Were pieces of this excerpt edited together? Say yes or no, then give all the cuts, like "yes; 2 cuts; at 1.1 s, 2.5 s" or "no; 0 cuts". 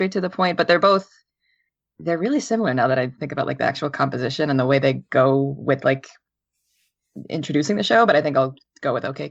no; 0 cuts